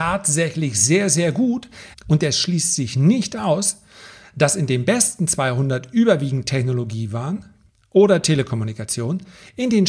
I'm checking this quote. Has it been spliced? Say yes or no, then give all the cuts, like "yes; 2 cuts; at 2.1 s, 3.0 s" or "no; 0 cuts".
yes; 1 cut; at 1.9 s